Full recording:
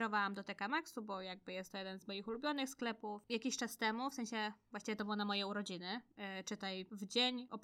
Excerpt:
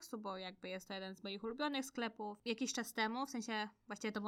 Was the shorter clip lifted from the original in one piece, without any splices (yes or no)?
yes